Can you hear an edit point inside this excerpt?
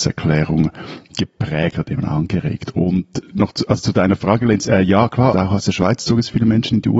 yes; 1 cut; at 5.3 s

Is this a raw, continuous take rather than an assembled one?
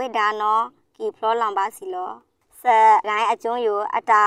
no; 1 cut; at 3.0 s

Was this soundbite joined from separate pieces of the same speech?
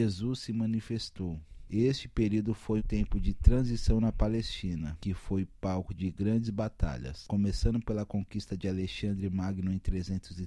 yes; 2 cuts; at 1.7 s, 2.8 s

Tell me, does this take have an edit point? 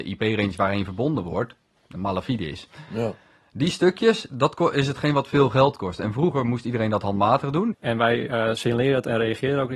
yes; 1 cut; at 7.7 s

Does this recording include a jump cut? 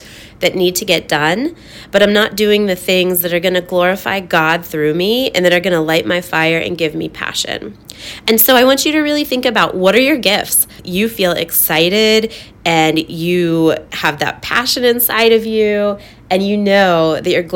yes; 2 cuts; at 10.8 s, 13.9 s

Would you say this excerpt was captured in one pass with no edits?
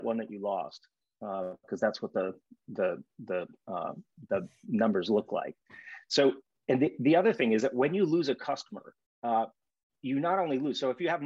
yes; 0 cuts

